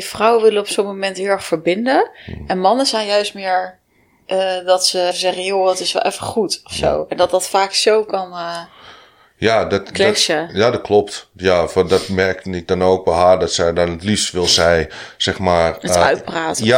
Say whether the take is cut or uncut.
cut